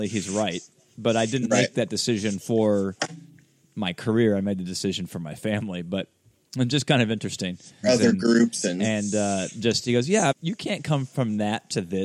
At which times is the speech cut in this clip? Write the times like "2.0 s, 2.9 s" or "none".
7.8 s, 10.3 s